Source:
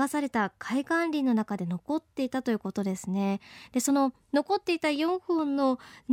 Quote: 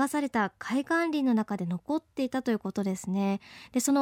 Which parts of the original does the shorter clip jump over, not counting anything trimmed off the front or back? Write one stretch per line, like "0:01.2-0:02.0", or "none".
none